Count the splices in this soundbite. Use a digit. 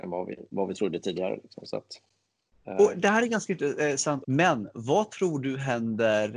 1